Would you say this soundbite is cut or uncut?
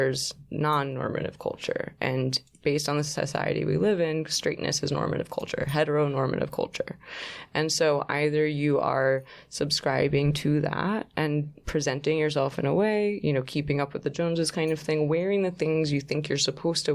uncut